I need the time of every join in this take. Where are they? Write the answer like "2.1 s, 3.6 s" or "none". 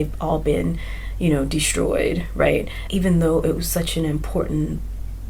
2.9 s

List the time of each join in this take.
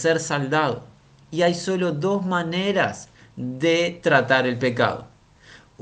none

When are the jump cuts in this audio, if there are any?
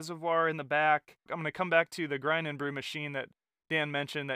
1.3 s

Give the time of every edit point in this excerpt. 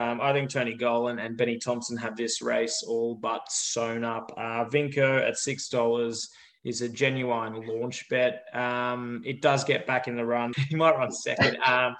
10.5 s

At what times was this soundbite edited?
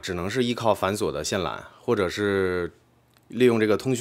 none

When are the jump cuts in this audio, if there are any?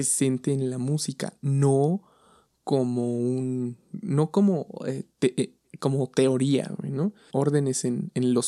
7.3 s

